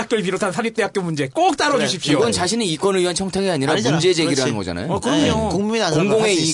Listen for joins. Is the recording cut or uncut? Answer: uncut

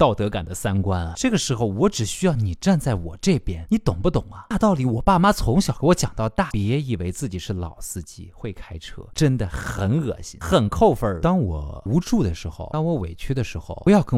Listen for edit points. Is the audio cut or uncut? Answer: cut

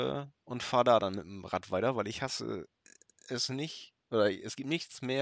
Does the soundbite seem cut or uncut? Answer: uncut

